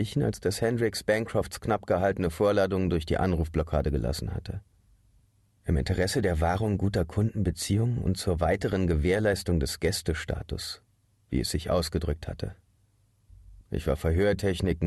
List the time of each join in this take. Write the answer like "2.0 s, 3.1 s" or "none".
13.6 s